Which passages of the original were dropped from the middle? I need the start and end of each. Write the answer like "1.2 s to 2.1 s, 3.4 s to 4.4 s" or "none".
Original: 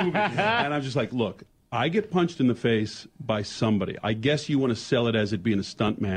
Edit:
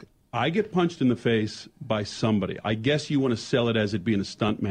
none

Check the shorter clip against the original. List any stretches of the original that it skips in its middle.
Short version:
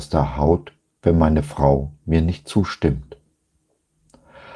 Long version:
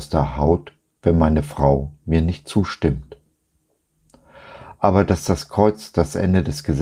none

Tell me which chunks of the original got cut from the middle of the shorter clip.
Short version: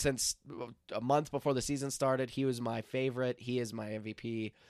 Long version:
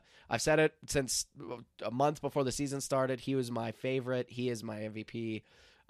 none

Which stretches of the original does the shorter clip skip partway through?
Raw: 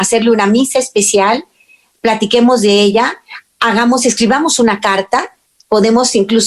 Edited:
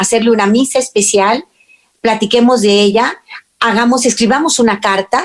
none

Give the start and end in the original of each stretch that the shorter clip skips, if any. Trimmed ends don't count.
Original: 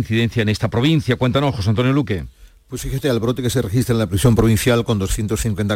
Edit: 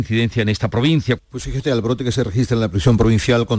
1.2 s to 2.6 s

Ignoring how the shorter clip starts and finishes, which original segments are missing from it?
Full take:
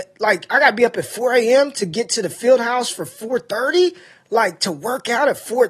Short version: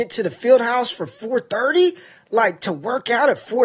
none

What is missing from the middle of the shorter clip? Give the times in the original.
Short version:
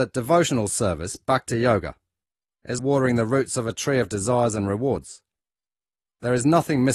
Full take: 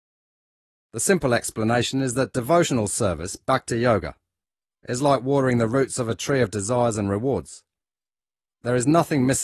5.0 s to 5.2 s

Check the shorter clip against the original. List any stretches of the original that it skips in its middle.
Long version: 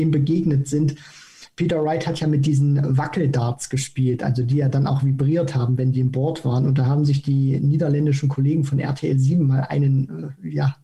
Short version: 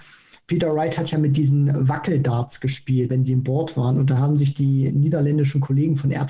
4.2 s to 5.8 s

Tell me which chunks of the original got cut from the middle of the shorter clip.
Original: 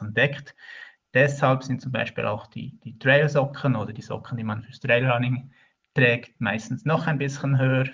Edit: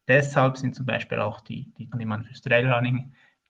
3.0 s to 4.3 s

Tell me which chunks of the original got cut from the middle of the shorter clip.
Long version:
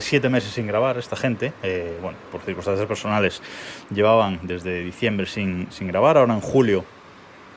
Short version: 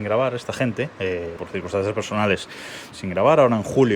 2.0 s to 2.3 s, 3.8 s to 5.7 s

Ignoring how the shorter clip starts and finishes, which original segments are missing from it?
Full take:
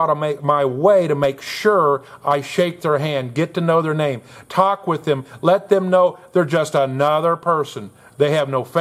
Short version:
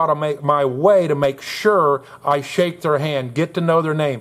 none

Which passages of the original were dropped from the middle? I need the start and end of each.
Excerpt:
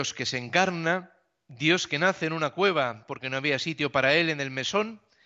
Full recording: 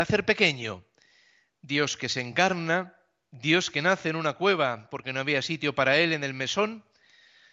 none

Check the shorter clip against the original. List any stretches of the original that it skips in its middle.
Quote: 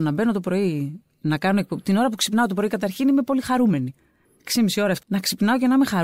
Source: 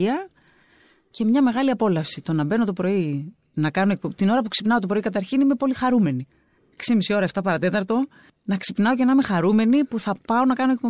7.3 s to 8.4 s

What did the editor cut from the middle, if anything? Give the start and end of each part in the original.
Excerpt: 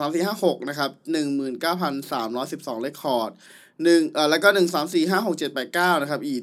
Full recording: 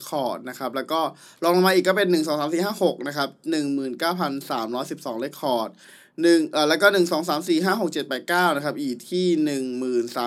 7.1 s to 7.2 s

